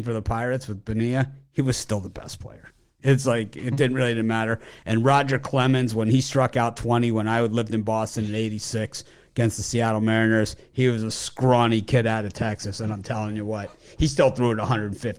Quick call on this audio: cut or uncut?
uncut